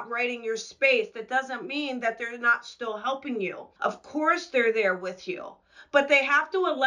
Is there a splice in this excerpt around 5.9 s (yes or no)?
no